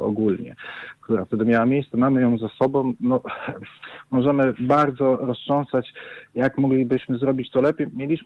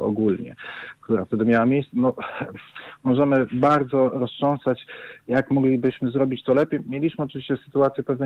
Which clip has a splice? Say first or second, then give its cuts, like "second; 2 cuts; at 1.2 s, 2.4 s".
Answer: second; 1 cut; at 1.9 s